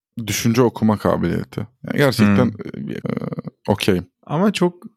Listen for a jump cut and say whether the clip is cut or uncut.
cut